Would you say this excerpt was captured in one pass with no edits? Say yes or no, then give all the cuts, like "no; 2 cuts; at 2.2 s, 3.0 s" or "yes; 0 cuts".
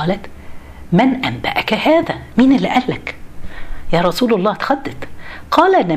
yes; 0 cuts